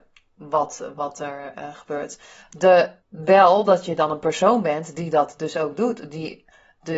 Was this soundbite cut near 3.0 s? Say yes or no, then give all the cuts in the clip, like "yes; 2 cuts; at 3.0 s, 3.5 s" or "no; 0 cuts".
yes; 1 cut; at 3.0 s